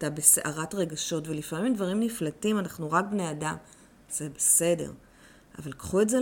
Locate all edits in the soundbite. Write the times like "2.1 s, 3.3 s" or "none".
none